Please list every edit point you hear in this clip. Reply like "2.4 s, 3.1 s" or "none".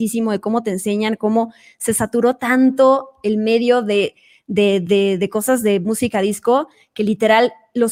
none